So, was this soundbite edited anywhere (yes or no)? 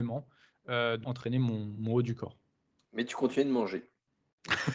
yes